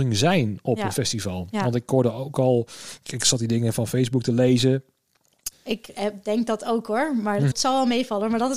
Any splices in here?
yes; 2 cuts; at 5.5 s, 7.5 s

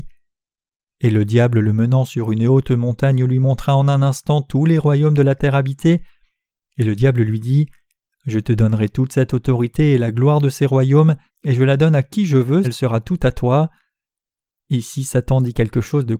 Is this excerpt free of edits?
no; 2 cuts; at 11.3 s, 12.6 s

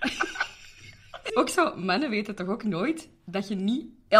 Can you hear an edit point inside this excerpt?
yes; 1 cut; at 1.3 s

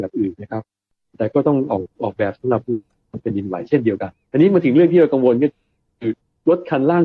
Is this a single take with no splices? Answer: yes; 0 cuts

